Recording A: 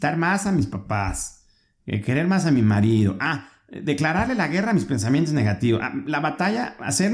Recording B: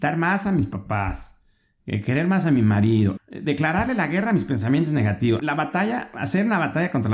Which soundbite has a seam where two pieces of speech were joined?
B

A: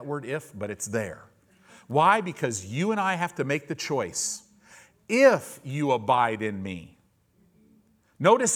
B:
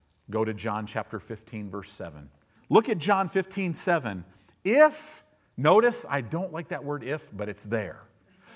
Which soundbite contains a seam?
B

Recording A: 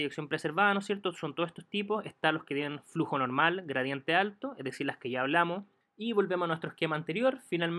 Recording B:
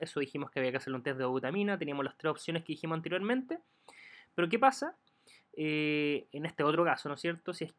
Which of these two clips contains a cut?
A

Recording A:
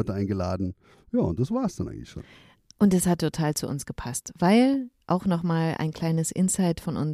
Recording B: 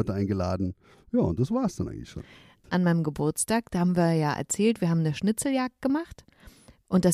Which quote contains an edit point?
B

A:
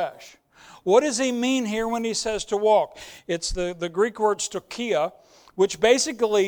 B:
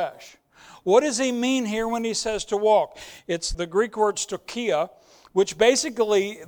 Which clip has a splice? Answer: B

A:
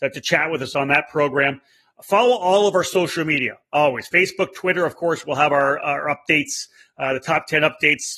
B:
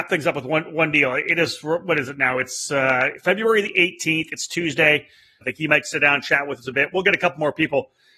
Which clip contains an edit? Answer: B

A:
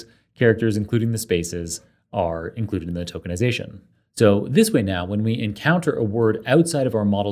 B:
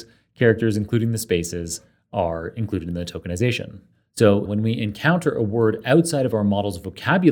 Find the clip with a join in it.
B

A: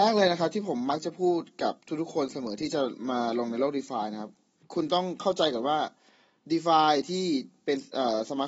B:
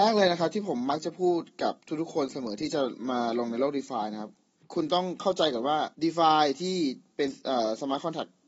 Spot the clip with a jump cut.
B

